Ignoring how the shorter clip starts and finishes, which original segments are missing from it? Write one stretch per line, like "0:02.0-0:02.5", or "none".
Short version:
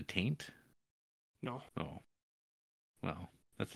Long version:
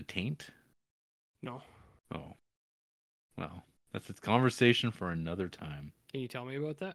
0:01.7-0:02.0